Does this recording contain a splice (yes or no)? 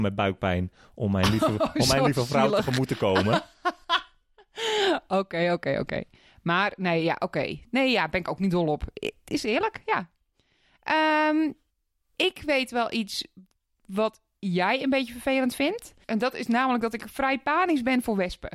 no